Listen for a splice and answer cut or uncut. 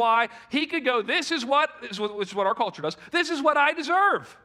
uncut